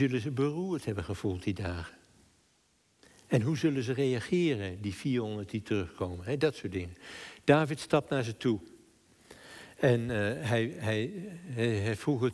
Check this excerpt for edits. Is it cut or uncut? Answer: uncut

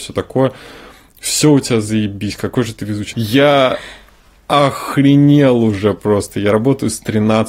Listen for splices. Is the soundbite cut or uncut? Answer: cut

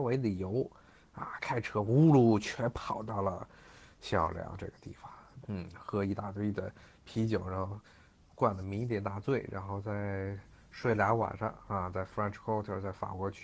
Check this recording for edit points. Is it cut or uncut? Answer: cut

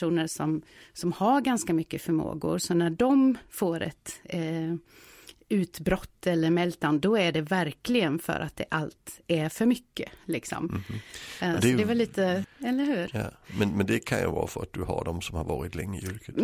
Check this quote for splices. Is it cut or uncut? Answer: cut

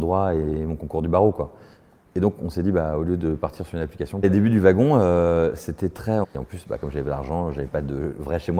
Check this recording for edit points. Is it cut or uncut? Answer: cut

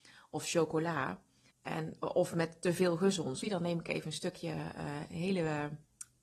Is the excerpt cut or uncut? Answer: cut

